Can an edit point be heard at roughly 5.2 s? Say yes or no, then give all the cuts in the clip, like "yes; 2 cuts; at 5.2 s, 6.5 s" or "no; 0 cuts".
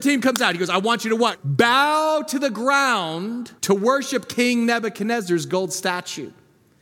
no; 2 cuts; at 1.3 s, 3.6 s